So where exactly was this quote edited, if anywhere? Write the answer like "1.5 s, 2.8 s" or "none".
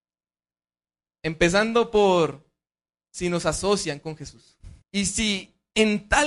4.8 s